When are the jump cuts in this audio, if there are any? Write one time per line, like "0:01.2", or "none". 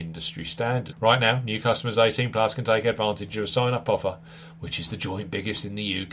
0:00.9